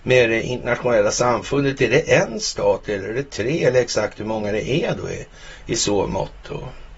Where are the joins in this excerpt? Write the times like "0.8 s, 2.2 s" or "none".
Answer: none